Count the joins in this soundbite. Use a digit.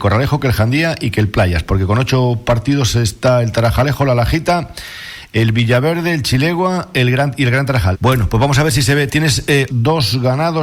2